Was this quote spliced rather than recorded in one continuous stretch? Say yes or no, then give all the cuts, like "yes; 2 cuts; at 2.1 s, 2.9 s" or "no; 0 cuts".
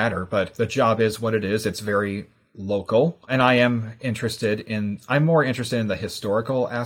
no; 0 cuts